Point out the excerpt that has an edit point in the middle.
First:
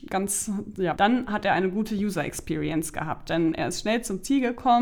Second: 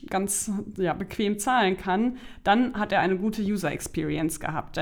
first; 1 cut; at 0.9 s

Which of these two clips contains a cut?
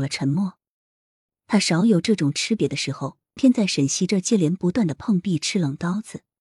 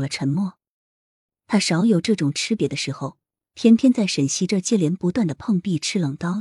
first; 1 cut; at 3.4 s

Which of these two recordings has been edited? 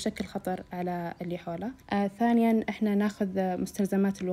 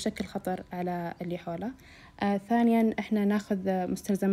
first; 1 cut; at 1.8 s

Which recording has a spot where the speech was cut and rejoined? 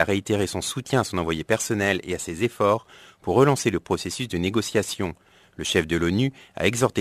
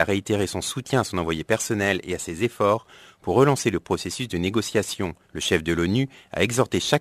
second; 1 cut; at 5.2 s

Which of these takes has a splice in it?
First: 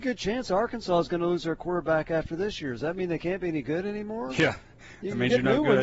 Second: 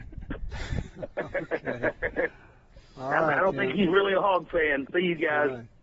second; 1 cut; at 4.9 s

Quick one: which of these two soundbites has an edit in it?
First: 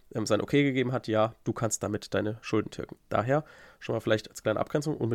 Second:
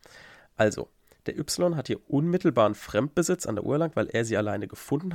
first; 1 cut; at 3.0 s

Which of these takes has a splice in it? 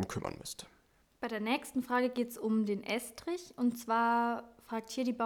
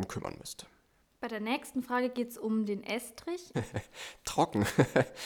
second; 1 cut; at 3.5 s

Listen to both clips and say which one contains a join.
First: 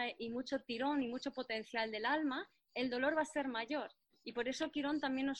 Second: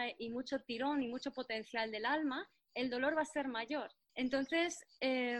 second; 1 cut; at 4.1 s

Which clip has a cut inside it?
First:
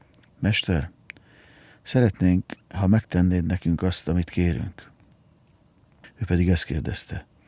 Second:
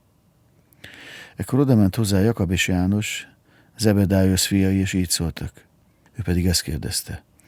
second; 1 cut; at 6.1 s

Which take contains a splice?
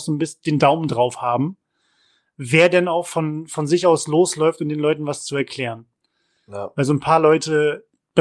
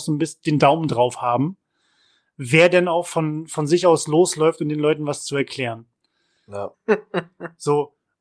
second; 1 cut; at 6.7 s

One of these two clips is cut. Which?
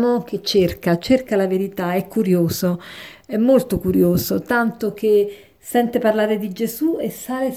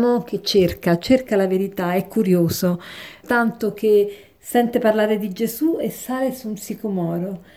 second; 1 cut; at 3.2 s

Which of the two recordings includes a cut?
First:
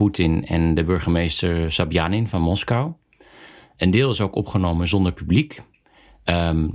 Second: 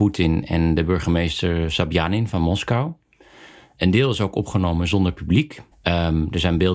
second; 1 cut; at 5.7 s

